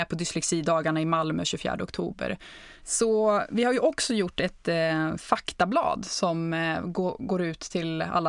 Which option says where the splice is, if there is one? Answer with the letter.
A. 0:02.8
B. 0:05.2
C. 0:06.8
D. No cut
A